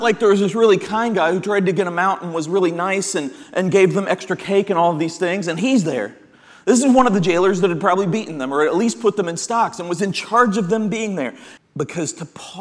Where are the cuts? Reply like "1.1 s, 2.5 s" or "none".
11.6 s